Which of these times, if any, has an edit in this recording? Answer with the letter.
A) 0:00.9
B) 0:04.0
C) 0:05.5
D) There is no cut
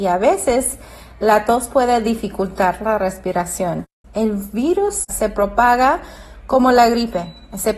B